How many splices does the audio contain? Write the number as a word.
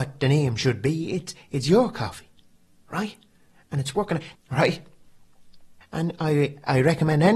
two